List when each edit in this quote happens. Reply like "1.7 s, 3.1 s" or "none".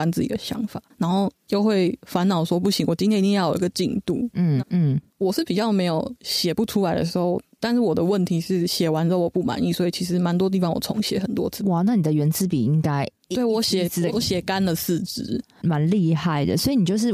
4.6 s, 11.6 s, 14.1 s